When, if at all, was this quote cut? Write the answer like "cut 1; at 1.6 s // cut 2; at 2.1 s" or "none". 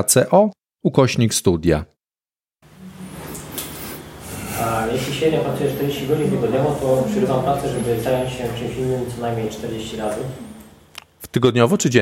none